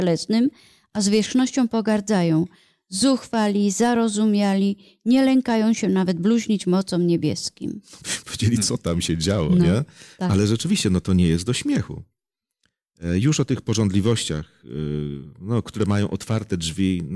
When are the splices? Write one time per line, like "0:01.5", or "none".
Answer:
none